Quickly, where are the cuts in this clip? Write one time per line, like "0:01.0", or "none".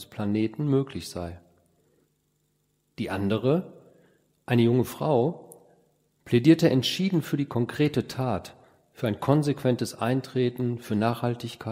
none